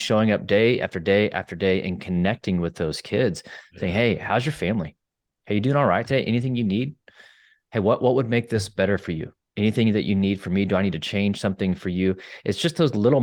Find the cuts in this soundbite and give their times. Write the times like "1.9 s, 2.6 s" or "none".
none